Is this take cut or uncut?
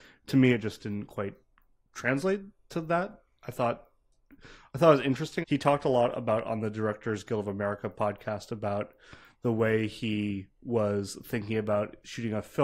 cut